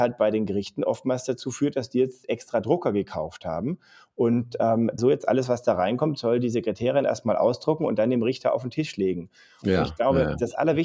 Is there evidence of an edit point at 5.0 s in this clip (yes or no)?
yes